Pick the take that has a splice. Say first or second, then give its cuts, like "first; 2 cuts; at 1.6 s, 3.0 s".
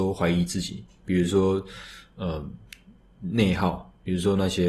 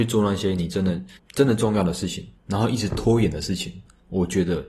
second; 2 cuts; at 1.2 s, 2.4 s